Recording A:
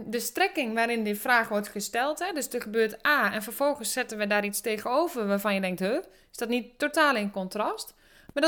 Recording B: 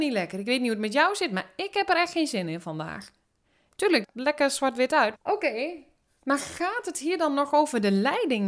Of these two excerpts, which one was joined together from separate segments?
B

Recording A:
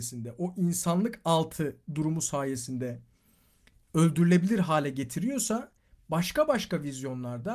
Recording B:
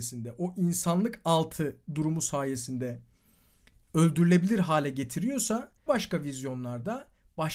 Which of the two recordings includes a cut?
B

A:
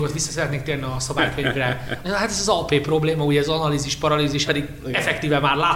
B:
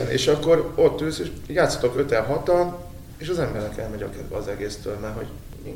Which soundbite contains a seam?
A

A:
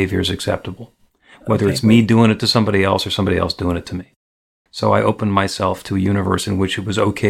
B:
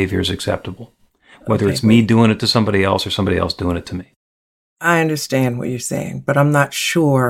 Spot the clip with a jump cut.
A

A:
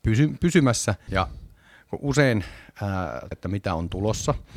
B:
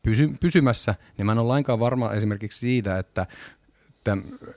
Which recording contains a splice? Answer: A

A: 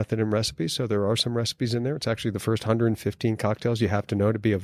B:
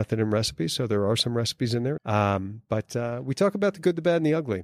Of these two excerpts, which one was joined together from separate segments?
B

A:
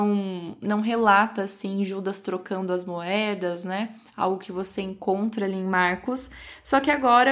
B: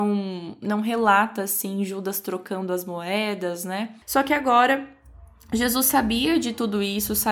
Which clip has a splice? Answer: B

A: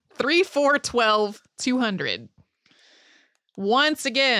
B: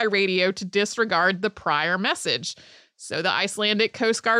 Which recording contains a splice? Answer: A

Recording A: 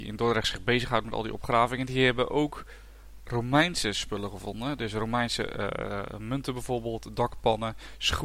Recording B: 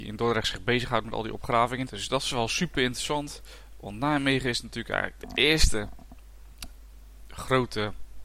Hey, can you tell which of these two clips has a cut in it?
B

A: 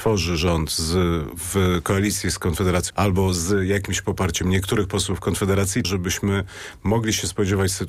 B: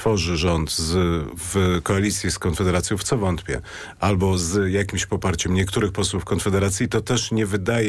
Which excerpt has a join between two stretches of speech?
A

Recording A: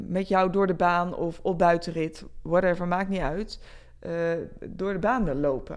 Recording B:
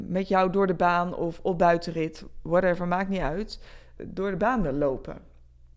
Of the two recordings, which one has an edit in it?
B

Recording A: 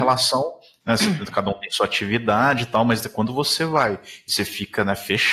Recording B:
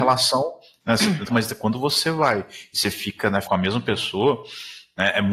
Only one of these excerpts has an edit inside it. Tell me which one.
B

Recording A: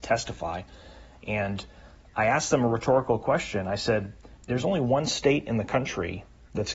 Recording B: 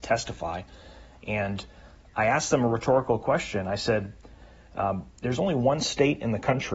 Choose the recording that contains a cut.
A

